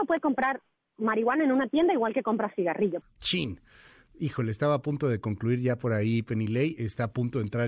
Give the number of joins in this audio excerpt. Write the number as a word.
one